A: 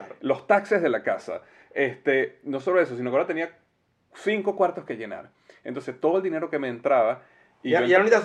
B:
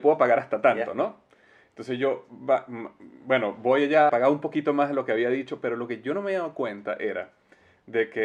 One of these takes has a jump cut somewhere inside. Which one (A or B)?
B